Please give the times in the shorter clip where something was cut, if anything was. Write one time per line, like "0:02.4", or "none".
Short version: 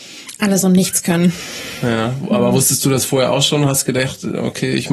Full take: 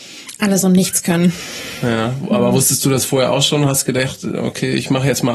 none